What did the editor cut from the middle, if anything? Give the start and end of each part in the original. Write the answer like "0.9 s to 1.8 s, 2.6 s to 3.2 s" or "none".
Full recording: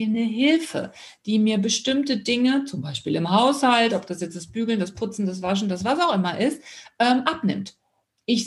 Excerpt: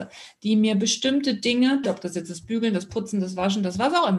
2.7 s to 3.9 s